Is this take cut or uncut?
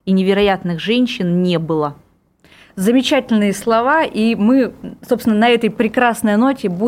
uncut